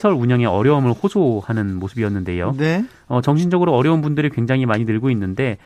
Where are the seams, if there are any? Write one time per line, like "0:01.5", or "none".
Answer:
none